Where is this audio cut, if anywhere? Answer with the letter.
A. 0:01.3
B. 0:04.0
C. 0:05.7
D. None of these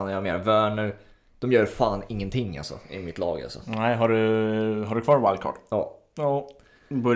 D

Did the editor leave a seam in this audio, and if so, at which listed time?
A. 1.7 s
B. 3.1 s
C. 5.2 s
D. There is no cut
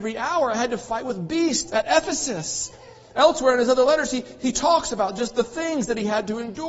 A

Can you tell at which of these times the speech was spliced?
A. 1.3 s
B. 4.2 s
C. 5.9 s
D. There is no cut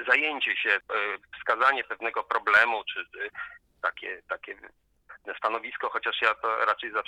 D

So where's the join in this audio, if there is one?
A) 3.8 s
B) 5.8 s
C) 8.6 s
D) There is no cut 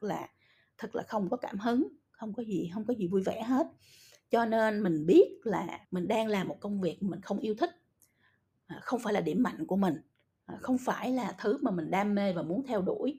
B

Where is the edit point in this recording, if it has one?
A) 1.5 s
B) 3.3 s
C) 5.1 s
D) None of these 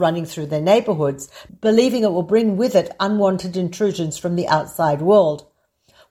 A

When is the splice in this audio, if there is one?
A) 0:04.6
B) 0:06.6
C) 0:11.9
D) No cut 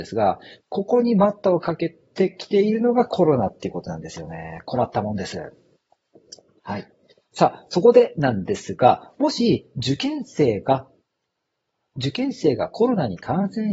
D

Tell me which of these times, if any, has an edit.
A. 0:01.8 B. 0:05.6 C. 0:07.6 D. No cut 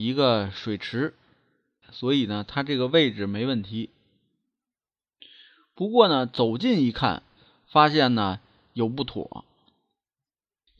A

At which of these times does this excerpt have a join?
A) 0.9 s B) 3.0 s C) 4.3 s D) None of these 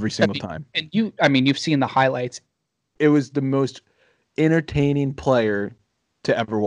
B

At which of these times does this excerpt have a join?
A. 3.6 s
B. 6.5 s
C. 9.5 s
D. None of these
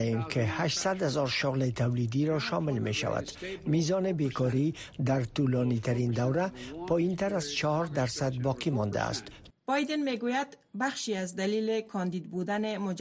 C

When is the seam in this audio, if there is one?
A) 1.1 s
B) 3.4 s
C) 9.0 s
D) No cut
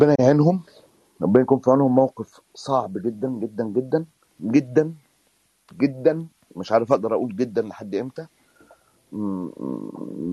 D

